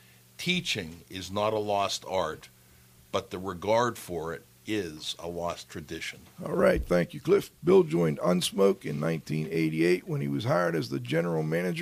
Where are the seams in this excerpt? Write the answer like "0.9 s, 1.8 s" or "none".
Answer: 6.4 s, 7.5 s